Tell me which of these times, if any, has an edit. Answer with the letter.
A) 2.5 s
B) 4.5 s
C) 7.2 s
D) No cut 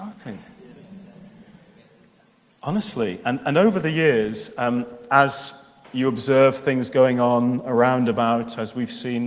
D